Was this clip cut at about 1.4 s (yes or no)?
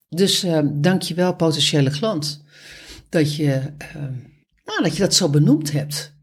no